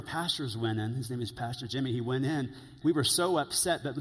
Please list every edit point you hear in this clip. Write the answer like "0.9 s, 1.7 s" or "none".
2.8 s